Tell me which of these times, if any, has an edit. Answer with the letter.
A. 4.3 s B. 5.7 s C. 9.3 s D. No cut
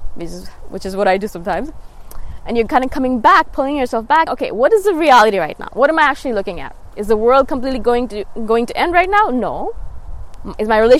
A